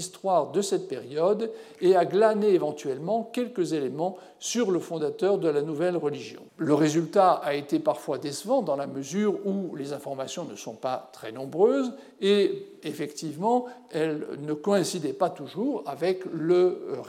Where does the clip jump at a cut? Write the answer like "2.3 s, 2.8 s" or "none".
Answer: 6.5 s, 12.8 s